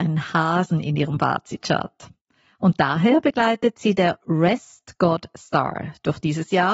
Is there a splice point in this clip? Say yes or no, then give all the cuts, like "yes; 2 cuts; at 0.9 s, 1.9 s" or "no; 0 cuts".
no; 0 cuts